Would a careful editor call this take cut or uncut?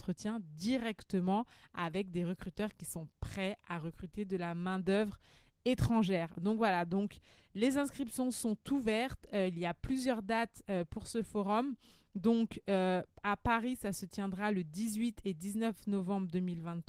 uncut